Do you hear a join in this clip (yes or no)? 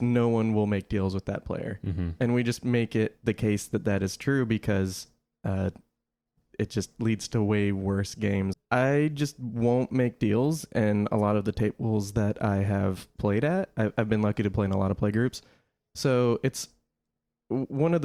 yes